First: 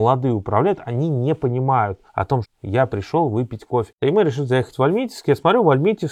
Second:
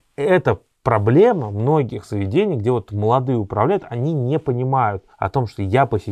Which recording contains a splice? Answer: first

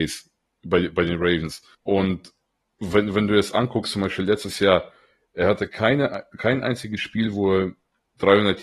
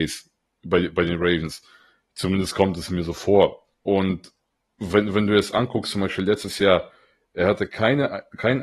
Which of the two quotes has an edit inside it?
first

